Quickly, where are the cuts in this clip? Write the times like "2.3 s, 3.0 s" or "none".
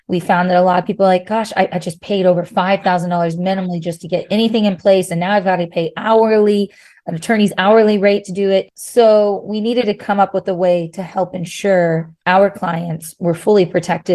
8.6 s, 12.2 s

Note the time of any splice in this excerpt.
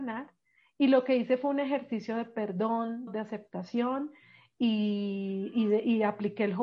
3.1 s

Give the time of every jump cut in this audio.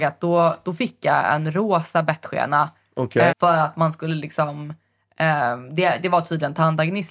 3.3 s

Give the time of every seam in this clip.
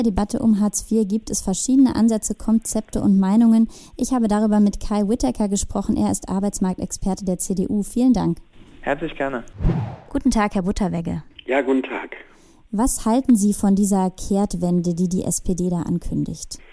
none

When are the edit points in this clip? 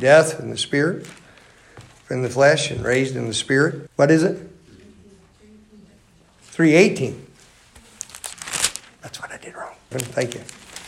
3.9 s, 9.9 s

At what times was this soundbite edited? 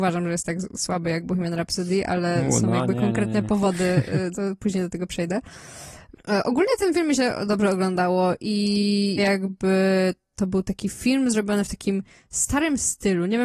4.3 s, 9.2 s

